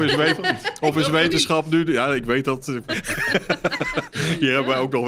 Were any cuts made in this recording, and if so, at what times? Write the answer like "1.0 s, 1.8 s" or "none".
2.8 s